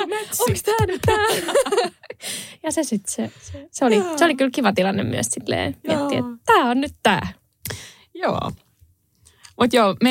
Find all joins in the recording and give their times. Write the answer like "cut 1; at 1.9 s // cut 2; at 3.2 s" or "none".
none